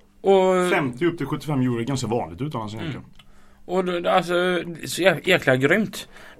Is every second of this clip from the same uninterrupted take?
yes; 0 cuts

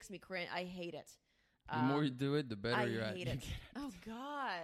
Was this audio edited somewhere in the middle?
no; 0 cuts

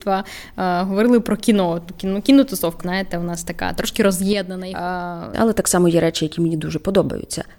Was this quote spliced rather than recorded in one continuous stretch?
yes; 2 cuts; at 2.8 s, 5.3 s

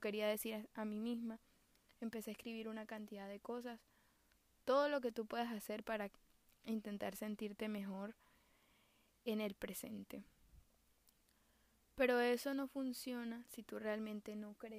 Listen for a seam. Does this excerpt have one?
no; 0 cuts

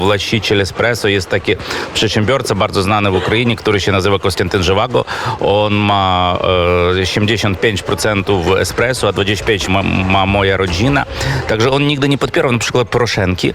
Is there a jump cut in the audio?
yes; 1 cut; at 9.7 s

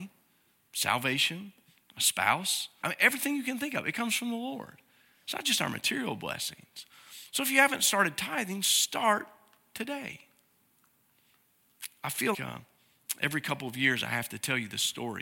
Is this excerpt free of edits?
no; 2 cuts; at 2.8 s, 12.3 s

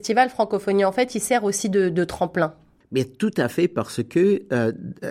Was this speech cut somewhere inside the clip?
no; 0 cuts

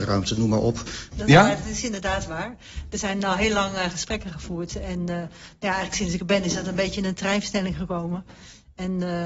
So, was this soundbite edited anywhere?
yes; 1 cut; at 1.1 s

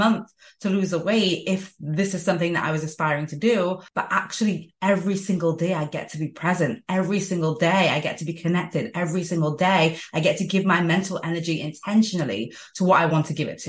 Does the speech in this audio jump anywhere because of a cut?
yes; 1 cut; at 3.9 s

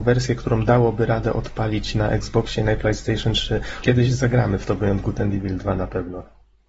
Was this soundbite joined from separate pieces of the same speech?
yes; 1 cut; at 3.8 s

